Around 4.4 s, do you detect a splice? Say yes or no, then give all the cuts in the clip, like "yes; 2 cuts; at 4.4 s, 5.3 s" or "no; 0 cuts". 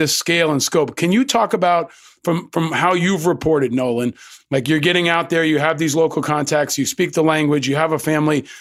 yes; 1 cut; at 4.4 s